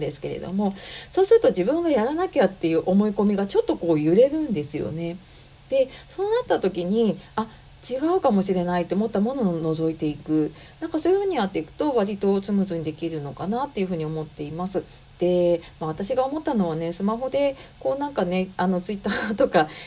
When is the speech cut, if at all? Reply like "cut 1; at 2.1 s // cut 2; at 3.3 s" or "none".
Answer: none